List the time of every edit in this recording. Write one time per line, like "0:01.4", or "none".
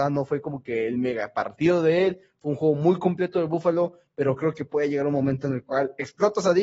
none